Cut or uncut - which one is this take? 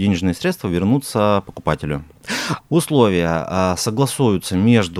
cut